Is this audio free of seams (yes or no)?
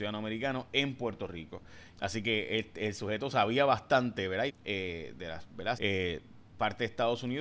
no